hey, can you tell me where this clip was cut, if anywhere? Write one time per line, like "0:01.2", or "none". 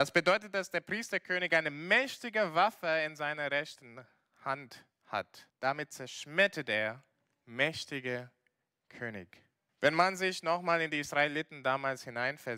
0:05.5
0:09.7